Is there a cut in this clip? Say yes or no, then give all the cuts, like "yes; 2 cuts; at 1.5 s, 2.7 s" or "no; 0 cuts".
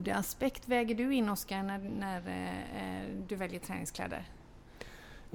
no; 0 cuts